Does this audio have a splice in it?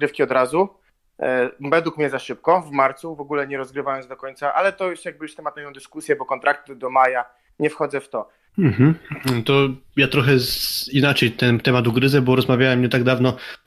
yes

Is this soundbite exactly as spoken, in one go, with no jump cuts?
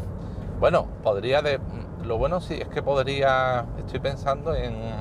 yes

